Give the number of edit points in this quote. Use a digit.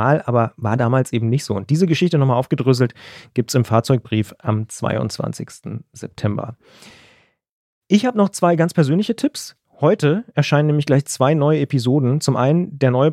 0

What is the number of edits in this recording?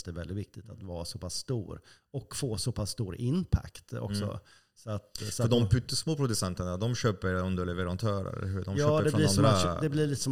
0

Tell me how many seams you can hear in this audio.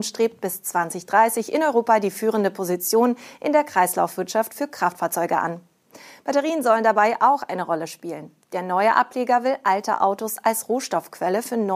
0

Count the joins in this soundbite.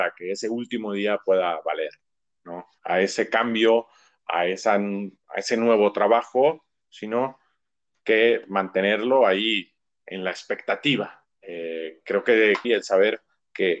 3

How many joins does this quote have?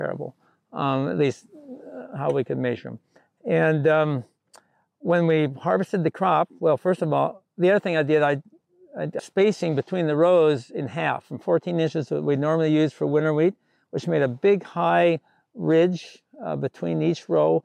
1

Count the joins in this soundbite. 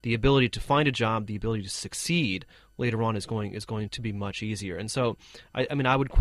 1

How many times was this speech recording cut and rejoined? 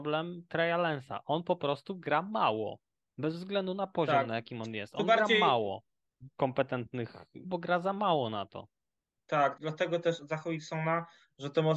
3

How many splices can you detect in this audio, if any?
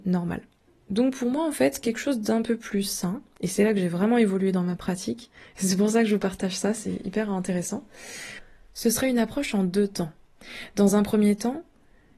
0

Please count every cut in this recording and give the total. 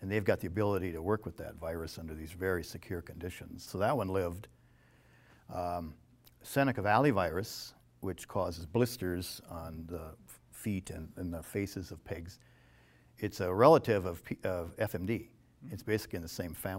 1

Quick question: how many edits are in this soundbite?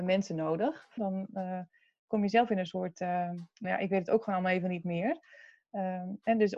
2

